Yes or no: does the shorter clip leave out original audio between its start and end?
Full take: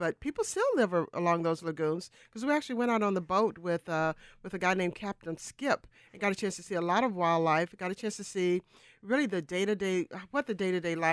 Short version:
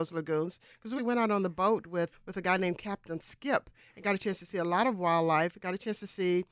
yes